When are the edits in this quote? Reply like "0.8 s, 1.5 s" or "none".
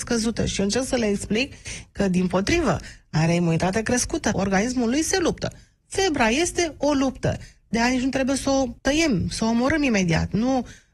4.3 s, 8.8 s